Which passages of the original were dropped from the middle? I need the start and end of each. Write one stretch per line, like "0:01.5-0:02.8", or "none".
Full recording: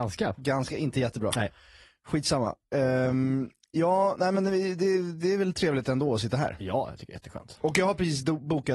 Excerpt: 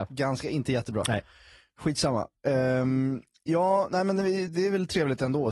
0:04.7-0:05.1